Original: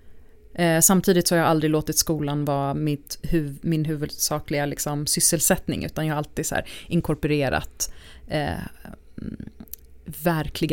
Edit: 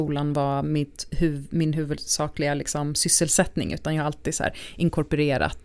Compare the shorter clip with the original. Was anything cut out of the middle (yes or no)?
no